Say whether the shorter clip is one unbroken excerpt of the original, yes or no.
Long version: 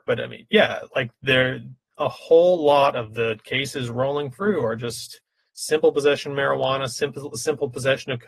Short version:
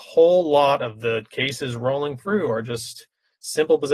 yes